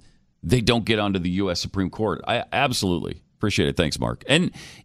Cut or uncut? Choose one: uncut